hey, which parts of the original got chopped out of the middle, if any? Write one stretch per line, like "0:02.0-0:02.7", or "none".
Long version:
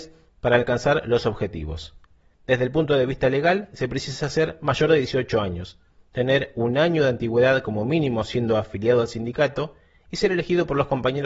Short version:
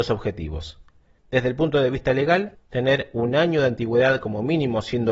0:03.7-0:06.0